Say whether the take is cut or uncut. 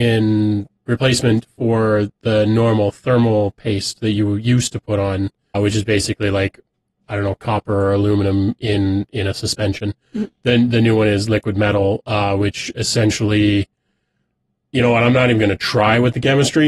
cut